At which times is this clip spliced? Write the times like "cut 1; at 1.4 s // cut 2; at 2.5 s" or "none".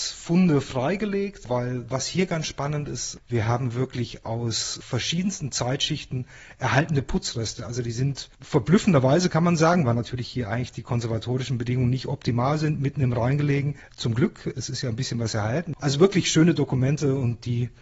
cut 1; at 13.9 s // cut 2; at 15.7 s